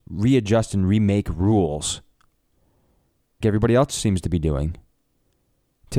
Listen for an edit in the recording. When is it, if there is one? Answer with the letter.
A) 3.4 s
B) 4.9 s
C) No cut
A